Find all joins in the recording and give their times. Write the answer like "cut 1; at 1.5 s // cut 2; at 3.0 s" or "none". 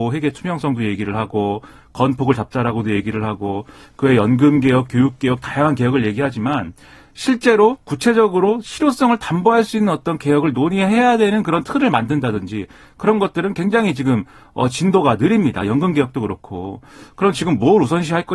none